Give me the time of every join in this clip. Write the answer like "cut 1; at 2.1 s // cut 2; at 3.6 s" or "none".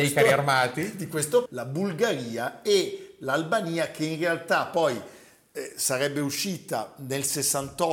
cut 1; at 1.5 s

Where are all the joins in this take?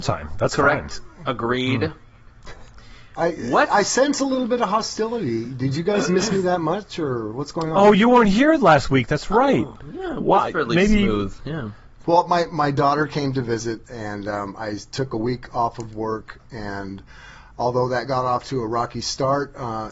cut 1; at 12.0 s

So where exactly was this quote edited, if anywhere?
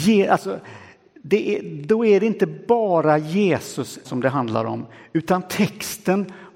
cut 1; at 4.0 s

